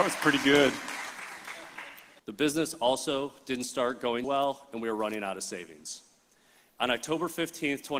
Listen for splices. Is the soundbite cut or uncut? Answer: cut